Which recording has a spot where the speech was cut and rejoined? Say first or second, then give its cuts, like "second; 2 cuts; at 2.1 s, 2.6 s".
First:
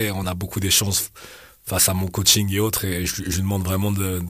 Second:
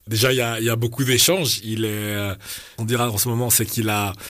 second; 1 cut; at 2.8 s